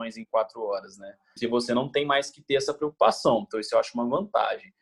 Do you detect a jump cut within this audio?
yes; 1 cut; at 1.4 s

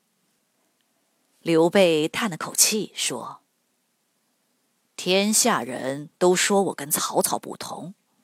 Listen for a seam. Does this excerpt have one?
no; 0 cuts

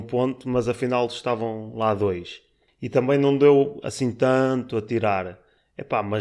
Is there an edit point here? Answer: no; 0 cuts

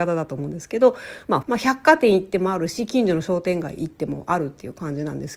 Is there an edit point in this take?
yes; 1 cut; at 1.4 s

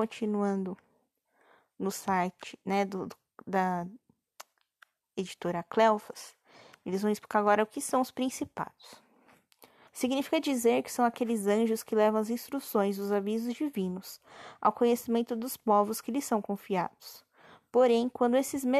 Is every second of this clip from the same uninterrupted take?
no; 1 cut; at 9.9 s

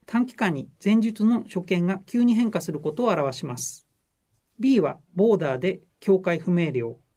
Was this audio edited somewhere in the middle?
yes; 1 cut; at 4.5 s

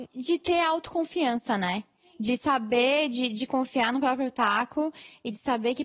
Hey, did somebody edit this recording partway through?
no; 0 cuts

